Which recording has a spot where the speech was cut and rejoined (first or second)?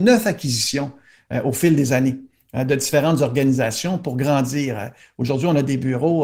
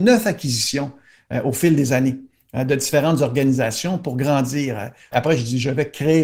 second